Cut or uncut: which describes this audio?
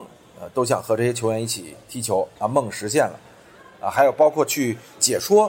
uncut